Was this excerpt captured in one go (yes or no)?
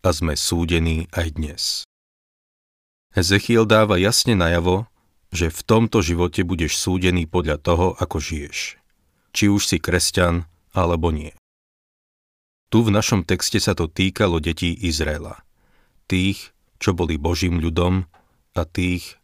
yes